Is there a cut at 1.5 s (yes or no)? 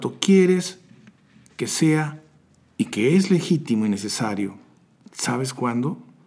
no